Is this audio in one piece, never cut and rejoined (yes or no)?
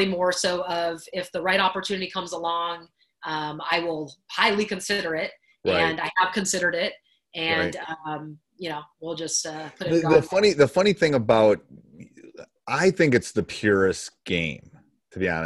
yes